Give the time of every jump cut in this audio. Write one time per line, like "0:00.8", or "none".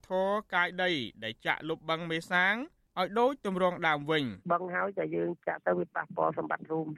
0:04.4